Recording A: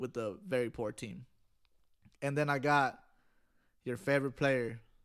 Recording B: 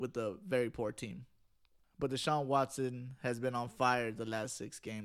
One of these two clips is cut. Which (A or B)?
B